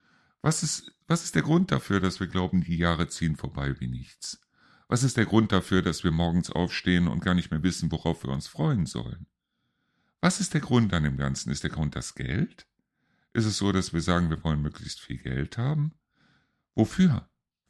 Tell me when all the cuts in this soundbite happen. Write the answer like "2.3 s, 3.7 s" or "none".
none